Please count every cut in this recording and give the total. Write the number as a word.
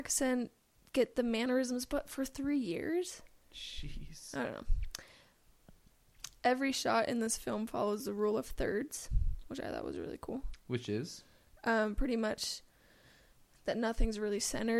zero